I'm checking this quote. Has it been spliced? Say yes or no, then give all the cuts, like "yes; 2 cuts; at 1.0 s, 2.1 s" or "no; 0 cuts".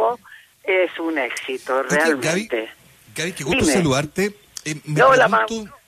no; 0 cuts